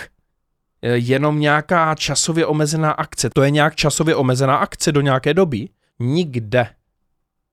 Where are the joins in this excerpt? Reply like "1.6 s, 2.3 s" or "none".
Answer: 3.3 s, 5.9 s